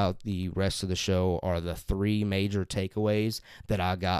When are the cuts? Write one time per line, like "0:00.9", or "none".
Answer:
none